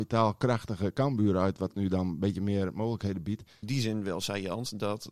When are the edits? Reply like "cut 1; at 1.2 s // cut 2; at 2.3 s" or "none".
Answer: cut 1; at 3.6 s